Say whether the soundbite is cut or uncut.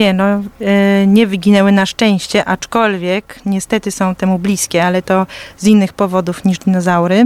uncut